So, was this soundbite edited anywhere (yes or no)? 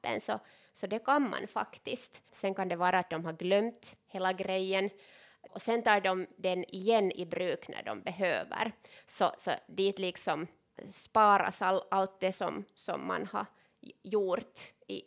yes